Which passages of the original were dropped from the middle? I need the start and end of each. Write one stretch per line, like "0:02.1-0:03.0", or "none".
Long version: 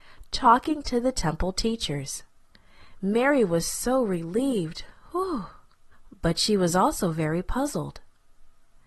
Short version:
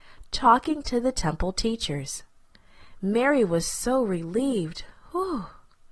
none